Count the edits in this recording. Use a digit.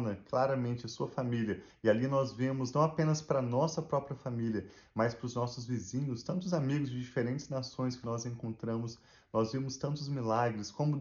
1